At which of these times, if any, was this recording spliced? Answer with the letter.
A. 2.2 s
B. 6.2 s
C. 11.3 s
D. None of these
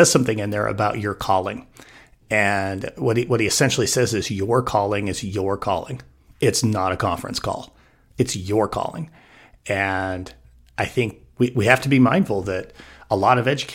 C